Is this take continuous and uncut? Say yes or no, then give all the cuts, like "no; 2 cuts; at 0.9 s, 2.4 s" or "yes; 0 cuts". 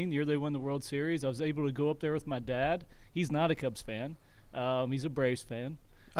yes; 0 cuts